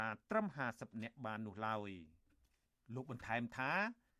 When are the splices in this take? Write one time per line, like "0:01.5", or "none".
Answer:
none